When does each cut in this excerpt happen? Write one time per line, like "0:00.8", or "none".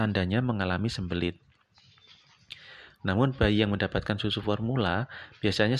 0:03.0